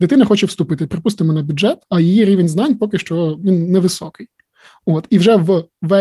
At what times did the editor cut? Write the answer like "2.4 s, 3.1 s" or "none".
1.8 s, 4.7 s